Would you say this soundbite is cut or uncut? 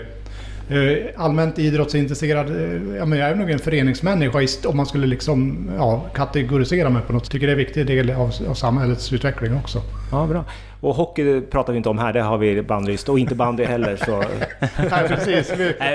cut